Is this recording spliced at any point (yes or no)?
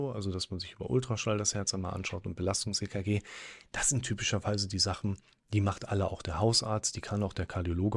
no